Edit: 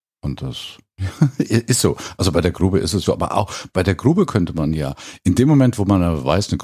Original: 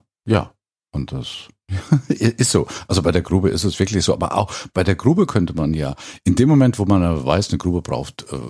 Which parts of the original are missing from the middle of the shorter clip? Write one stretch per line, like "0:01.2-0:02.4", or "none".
0:03.8-0:04.1